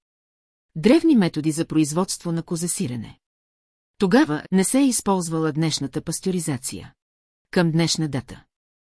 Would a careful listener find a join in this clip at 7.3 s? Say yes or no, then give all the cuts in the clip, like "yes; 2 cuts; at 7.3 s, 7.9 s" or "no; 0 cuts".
yes; 2 cuts; at 4.4 s, 7.3 s